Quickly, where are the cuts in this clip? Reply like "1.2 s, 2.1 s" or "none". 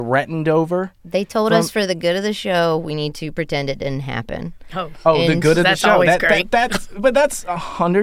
none

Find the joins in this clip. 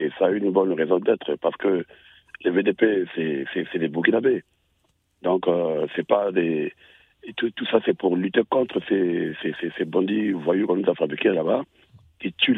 none

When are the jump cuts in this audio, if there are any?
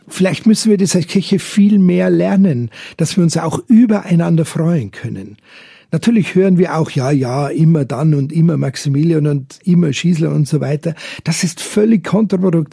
none

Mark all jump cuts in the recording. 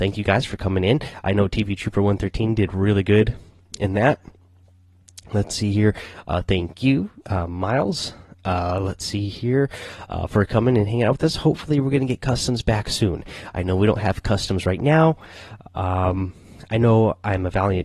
none

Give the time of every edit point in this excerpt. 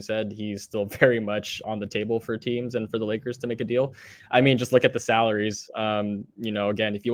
1.6 s

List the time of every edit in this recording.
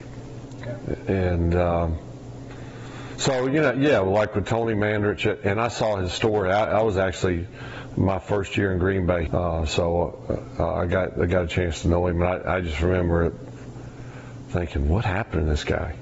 9.3 s

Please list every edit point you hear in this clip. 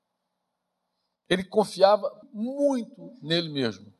2.2 s

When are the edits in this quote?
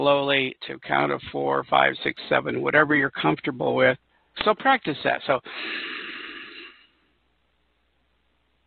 4.3 s

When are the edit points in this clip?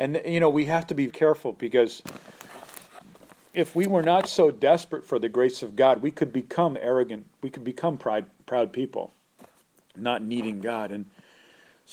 1.1 s

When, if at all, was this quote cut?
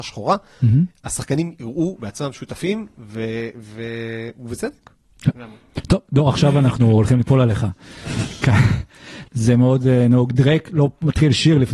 9.2 s

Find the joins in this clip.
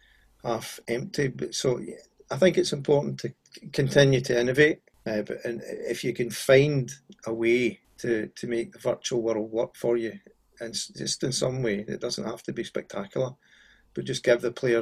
none

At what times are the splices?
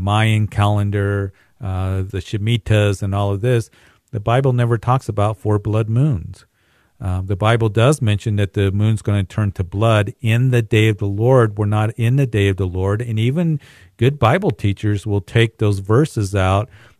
2.1 s

